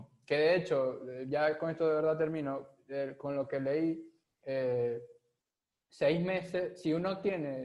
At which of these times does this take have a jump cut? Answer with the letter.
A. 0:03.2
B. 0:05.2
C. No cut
C